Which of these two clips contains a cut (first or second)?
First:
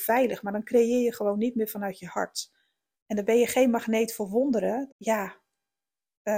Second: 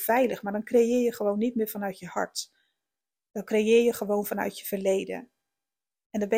first